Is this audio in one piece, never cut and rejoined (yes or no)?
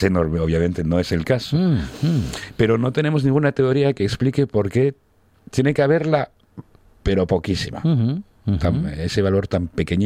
yes